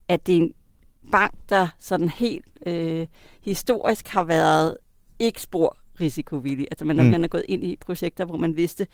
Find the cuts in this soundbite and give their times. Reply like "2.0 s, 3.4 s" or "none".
7.1 s